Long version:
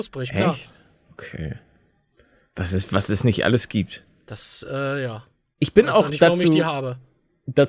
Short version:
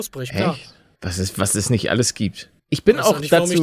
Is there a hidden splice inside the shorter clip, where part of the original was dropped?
yes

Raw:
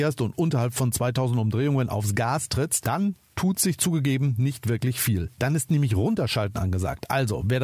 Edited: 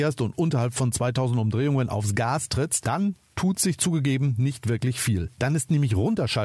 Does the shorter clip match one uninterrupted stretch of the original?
yes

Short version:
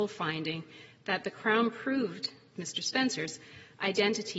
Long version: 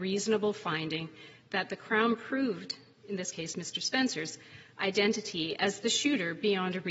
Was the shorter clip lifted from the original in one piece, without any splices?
no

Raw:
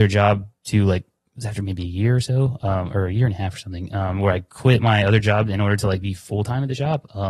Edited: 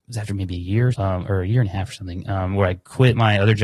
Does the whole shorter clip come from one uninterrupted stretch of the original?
no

